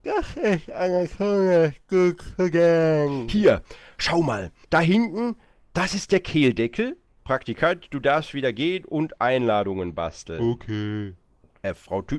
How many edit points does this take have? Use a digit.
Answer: 2